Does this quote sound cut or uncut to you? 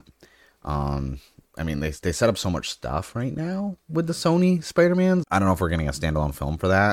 cut